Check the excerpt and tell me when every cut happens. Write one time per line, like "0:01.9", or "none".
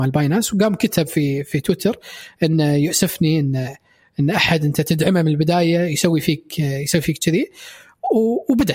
none